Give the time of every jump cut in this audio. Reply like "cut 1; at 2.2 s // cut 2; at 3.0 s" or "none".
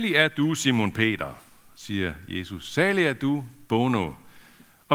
none